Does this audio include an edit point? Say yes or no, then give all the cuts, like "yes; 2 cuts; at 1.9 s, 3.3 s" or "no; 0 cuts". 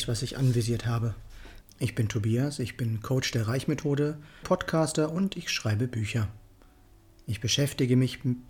yes; 2 cuts; at 1.6 s, 4.4 s